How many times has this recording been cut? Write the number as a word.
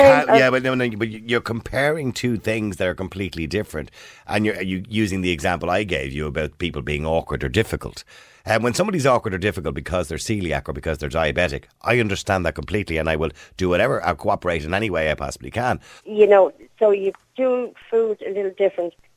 one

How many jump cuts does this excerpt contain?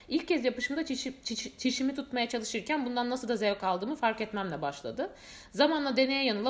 zero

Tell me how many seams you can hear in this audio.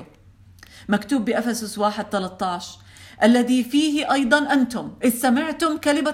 zero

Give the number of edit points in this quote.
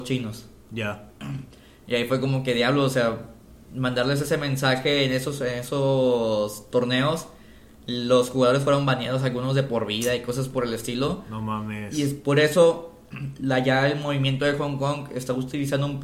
zero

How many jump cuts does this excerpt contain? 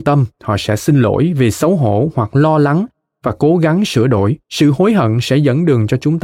one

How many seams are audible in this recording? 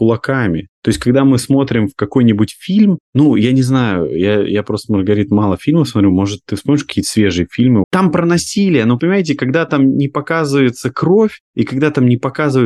two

